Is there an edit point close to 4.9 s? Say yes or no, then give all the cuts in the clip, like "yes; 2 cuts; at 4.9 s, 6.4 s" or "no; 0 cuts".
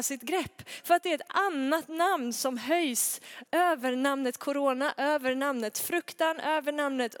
no; 1 cut; at 3.5 s